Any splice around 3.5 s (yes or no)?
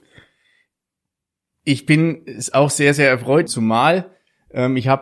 yes